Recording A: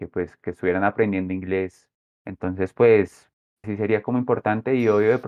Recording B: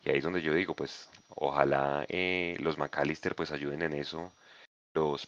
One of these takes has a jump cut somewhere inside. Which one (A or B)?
A